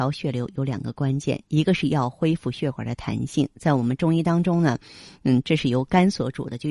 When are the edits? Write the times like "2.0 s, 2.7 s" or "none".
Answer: none